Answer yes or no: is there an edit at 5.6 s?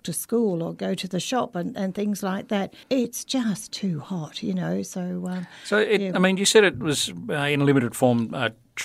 no